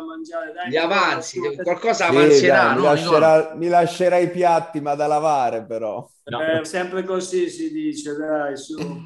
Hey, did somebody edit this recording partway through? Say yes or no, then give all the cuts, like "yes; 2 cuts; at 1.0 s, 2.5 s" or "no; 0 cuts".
yes; 1 cut; at 6.6 s